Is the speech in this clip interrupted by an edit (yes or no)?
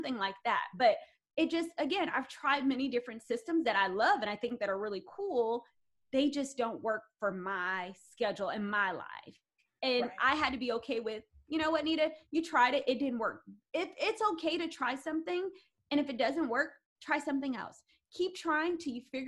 no